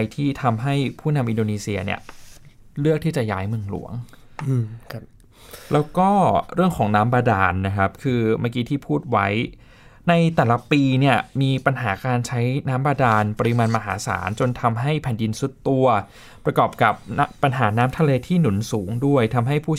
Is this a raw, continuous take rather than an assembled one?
yes; 0 cuts

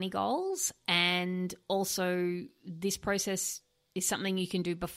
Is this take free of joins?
yes; 0 cuts

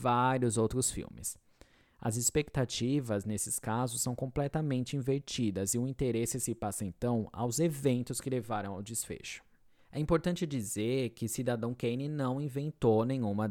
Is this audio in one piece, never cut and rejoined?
yes; 0 cuts

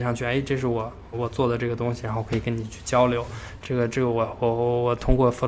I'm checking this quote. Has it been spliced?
yes; 2 cuts; at 1.1 s, 3.6 s

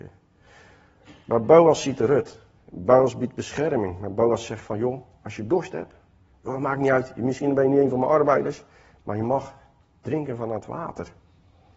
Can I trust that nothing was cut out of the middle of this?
yes; 0 cuts

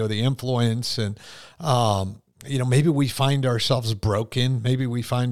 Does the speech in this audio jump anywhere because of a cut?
no; 0 cuts

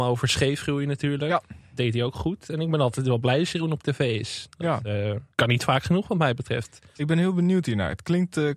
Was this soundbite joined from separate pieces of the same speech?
yes; 2 cuts; at 5.3 s, 7.0 s

